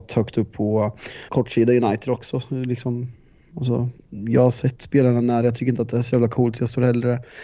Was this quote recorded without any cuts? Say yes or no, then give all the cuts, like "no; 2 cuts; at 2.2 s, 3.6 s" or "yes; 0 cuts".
no; 1 cut; at 1.3 s